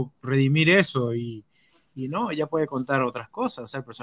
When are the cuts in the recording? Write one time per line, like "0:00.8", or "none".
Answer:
none